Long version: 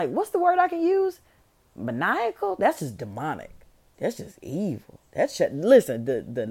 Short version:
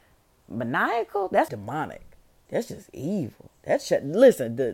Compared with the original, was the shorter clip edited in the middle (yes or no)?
yes